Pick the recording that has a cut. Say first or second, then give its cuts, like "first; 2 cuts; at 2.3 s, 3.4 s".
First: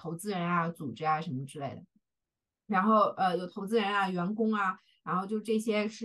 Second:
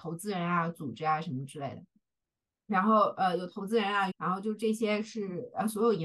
second; 1 cut; at 4.1 s